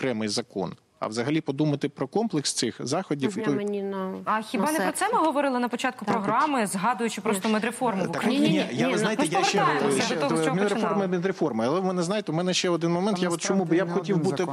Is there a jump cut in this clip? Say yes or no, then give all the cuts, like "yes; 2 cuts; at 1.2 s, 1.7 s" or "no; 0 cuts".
yes; 1 cut; at 3.4 s